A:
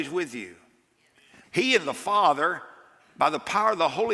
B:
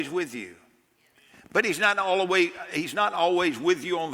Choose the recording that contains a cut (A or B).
A